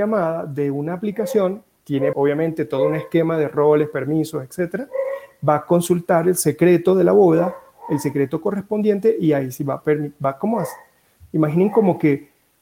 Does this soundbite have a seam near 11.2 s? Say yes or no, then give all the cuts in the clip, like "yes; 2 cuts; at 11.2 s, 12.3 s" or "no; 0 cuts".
no; 1 cut; at 2.1 s